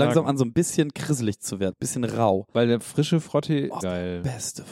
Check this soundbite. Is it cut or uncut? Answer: cut